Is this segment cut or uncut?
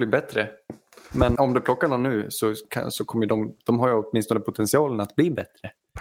cut